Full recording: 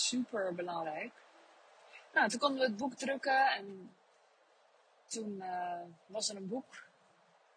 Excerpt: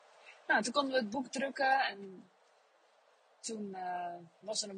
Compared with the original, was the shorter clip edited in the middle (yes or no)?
no